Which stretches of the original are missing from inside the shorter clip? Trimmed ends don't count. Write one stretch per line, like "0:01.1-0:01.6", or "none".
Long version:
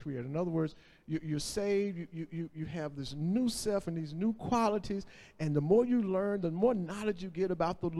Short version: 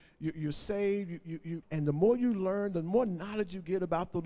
0:02.5-0:05.3